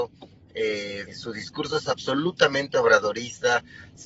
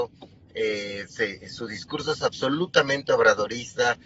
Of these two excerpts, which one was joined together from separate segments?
first; 1 cut; at 1.1 s

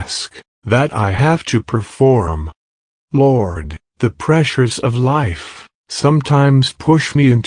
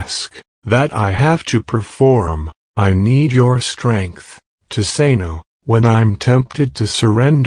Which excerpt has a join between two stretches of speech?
second; 1 cut; at 2.7 s

